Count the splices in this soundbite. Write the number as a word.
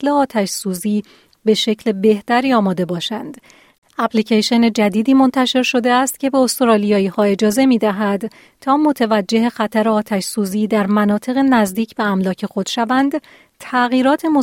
one